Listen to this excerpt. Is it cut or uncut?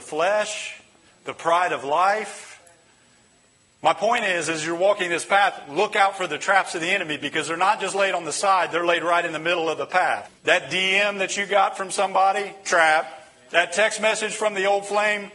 cut